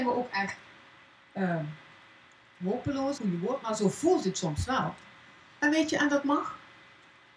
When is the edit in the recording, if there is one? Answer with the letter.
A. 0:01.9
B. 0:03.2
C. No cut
B